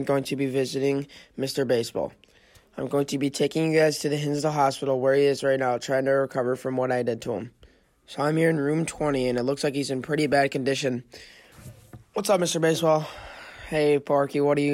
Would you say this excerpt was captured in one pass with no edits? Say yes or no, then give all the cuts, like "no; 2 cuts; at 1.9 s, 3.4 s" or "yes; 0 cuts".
yes; 0 cuts